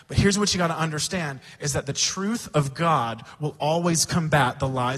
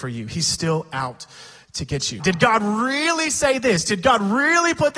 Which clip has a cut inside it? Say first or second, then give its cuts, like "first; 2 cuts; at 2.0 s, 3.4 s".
second; 1 cut; at 2.2 s